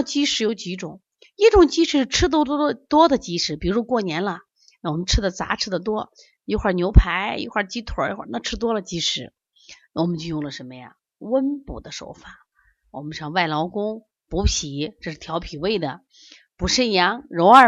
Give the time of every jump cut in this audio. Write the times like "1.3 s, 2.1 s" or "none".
9.9 s